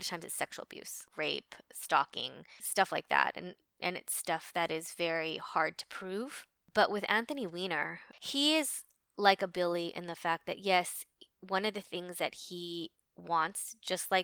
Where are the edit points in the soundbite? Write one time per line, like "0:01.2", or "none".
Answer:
none